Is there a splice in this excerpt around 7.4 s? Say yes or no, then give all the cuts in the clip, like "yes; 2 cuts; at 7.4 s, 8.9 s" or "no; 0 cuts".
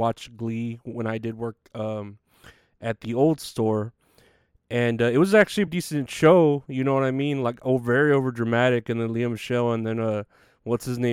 no; 1 cut; at 5.7 s